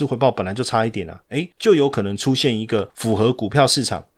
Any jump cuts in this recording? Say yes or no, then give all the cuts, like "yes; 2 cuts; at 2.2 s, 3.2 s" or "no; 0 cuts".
yes; 1 cut; at 1.2 s